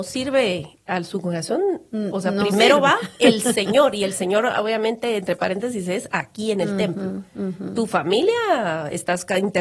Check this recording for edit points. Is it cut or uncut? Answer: uncut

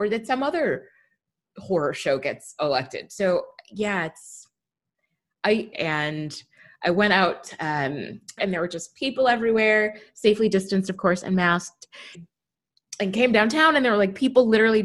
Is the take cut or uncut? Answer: cut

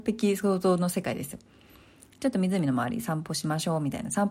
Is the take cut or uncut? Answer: uncut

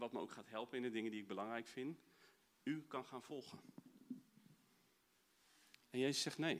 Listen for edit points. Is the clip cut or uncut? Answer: uncut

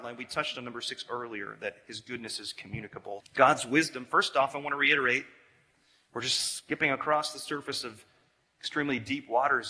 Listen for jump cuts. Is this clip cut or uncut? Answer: cut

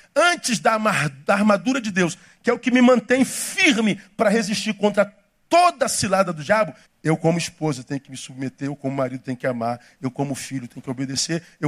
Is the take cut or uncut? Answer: cut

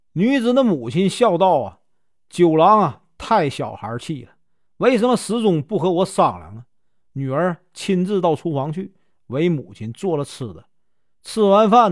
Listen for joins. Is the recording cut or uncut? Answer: uncut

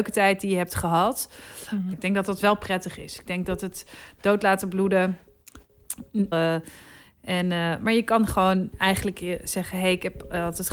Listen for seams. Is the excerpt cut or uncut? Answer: cut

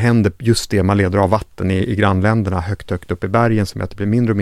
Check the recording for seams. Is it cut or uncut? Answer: uncut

